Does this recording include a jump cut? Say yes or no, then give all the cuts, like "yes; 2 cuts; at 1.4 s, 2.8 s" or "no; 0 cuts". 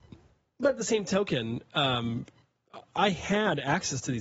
no; 0 cuts